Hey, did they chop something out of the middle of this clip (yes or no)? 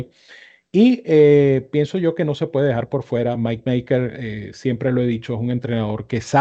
no